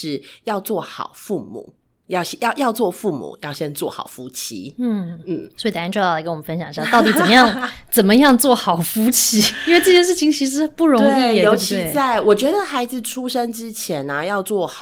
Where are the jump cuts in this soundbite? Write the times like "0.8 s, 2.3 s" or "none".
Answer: none